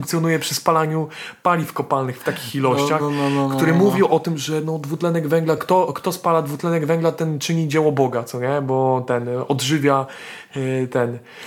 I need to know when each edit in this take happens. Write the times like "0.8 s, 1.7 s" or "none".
none

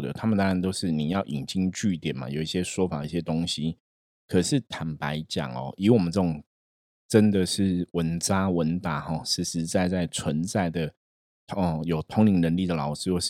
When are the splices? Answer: none

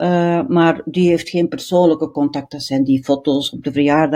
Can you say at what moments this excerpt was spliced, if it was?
none

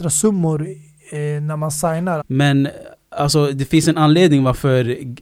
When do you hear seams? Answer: 2.2 s

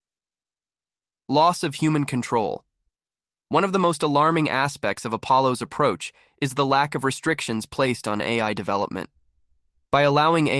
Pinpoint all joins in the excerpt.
none

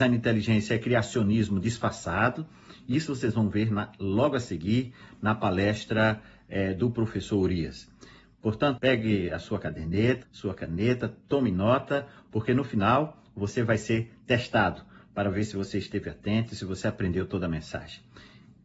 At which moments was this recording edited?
8.8 s, 10.2 s

